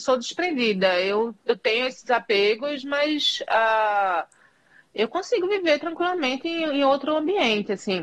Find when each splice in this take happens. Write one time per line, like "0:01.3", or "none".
none